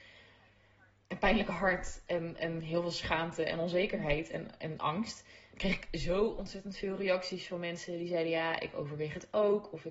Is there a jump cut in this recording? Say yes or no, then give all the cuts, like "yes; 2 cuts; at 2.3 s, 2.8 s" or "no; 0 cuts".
no; 0 cuts